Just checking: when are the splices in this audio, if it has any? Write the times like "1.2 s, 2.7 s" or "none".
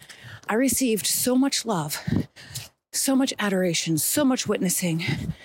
none